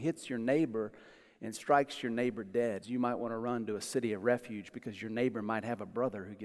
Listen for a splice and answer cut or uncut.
cut